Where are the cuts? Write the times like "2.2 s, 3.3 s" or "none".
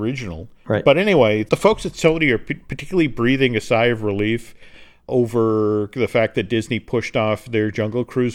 none